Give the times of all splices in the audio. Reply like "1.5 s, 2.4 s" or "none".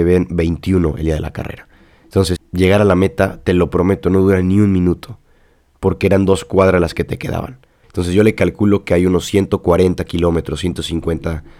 2.4 s, 7.8 s

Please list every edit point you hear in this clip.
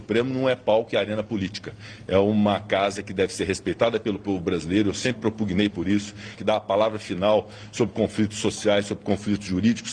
6.4 s

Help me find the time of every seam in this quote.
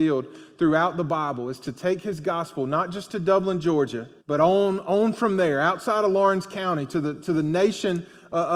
4.2 s, 6.9 s

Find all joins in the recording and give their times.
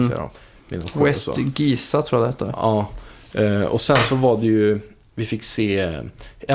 none

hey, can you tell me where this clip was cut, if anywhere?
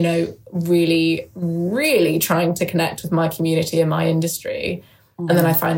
none

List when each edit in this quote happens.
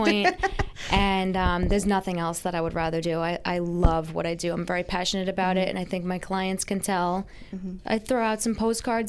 7.8 s

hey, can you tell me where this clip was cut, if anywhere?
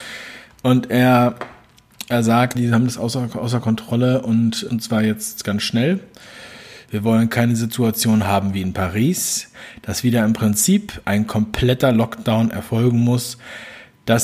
2.5 s, 4.7 s, 6.9 s

